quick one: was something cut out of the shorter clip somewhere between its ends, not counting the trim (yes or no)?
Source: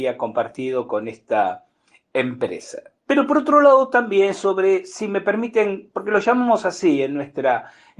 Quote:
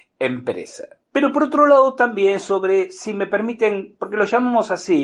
no